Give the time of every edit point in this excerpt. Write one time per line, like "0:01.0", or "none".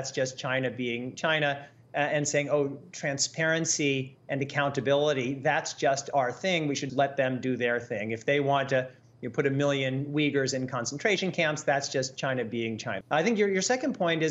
0:06.9
0:13.0

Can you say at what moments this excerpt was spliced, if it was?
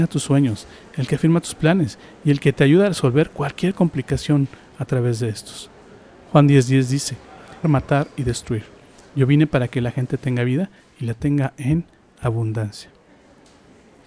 0:07.6

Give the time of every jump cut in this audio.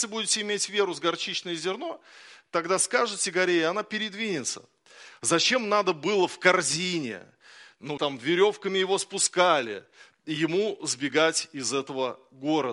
0:08.0

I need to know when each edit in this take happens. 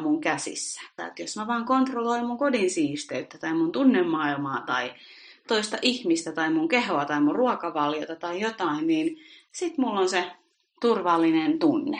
0:01.0

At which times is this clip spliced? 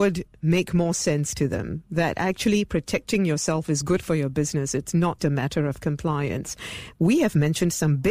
0:05.2
0:06.9

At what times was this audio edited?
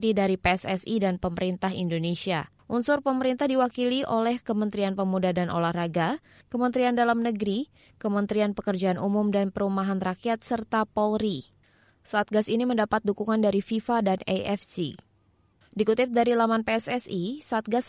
0:06.4

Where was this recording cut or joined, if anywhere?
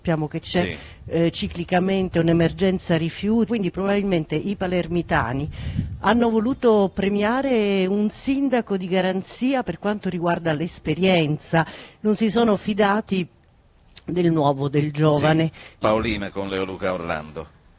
0:03.5
0:15.8

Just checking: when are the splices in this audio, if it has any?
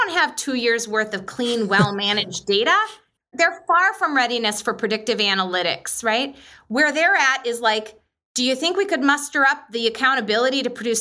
0:03.3

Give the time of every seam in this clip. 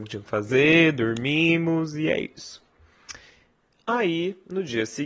none

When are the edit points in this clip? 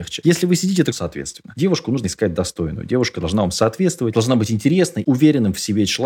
0:00.9
0:05.0

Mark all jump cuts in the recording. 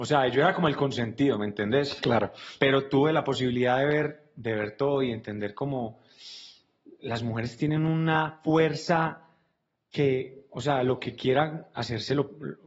none

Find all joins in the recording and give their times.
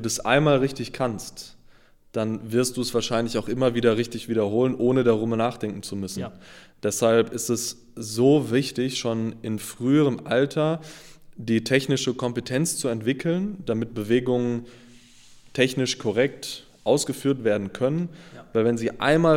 none

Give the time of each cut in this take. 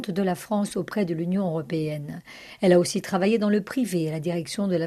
none

